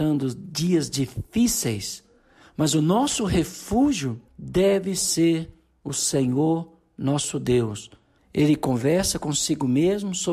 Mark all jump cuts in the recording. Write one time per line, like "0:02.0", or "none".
0:04.3
0:08.2